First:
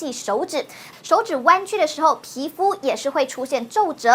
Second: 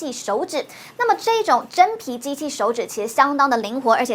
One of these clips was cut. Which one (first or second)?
first